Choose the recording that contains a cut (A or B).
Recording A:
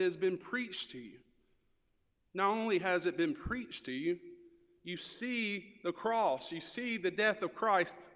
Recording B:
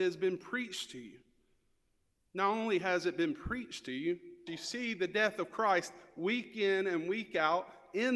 B